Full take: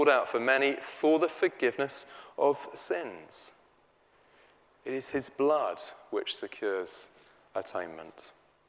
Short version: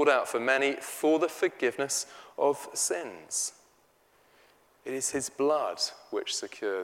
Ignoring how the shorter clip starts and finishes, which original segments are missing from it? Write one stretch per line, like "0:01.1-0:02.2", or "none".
none